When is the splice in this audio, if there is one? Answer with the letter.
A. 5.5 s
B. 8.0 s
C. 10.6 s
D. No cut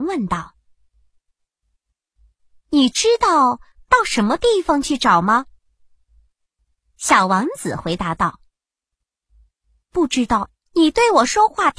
C